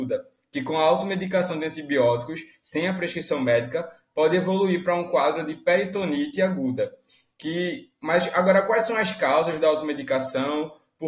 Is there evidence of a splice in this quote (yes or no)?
no